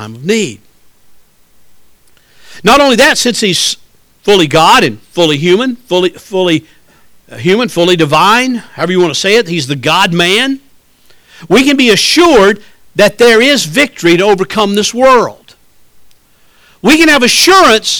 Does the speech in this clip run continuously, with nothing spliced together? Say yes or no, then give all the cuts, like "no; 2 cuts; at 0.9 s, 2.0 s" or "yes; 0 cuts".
yes; 0 cuts